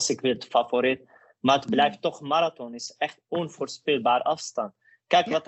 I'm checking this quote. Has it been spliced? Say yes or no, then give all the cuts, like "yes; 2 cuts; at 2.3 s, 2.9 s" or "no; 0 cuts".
no; 0 cuts